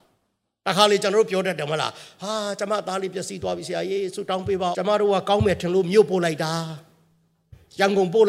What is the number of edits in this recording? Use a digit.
1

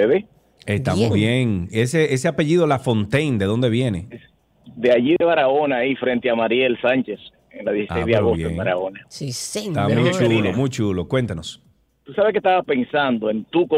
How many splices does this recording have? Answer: 0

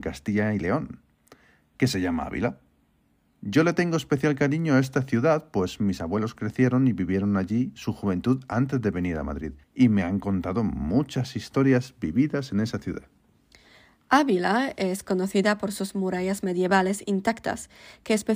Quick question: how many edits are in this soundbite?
1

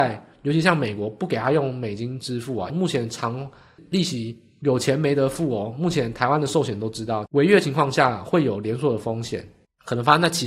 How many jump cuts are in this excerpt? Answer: 2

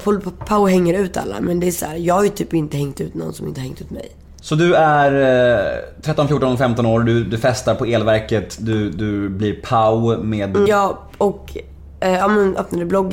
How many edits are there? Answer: 2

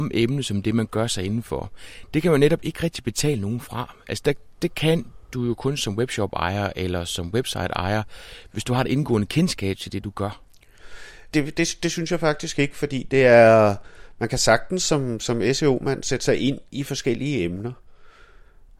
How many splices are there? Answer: 1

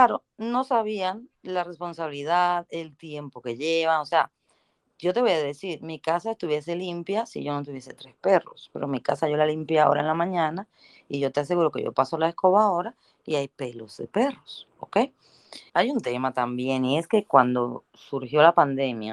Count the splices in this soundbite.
1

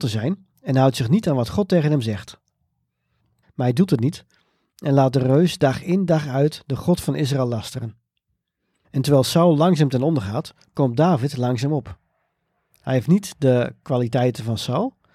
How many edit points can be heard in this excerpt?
2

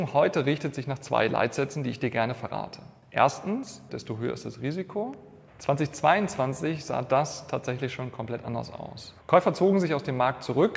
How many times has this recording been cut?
3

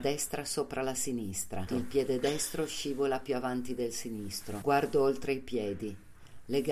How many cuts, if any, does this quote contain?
2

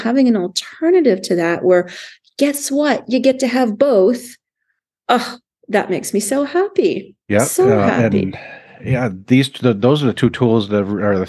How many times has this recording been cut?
1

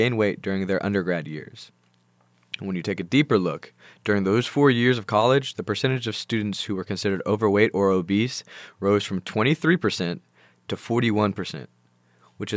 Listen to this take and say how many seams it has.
0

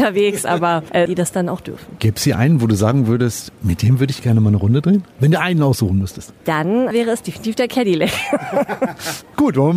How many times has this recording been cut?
1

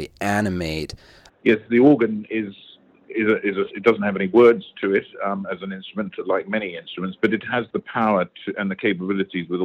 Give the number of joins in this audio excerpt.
1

